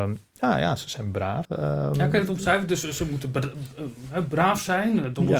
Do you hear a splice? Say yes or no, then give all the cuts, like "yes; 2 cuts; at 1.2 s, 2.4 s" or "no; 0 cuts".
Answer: yes; 1 cut; at 1.4 s